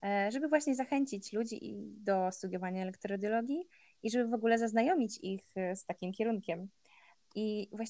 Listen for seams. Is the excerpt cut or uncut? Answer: uncut